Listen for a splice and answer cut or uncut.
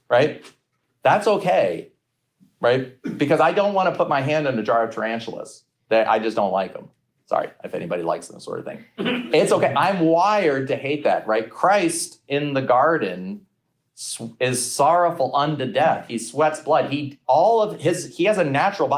uncut